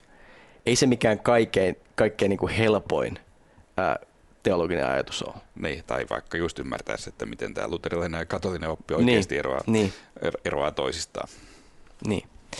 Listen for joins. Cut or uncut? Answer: uncut